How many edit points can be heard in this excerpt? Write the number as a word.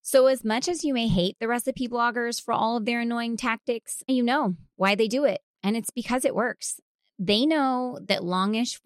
one